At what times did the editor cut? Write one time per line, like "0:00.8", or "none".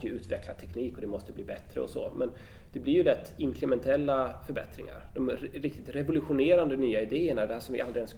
none